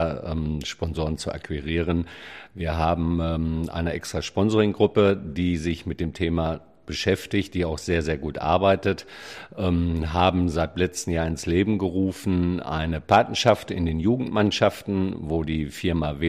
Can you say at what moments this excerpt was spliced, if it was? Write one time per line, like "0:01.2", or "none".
none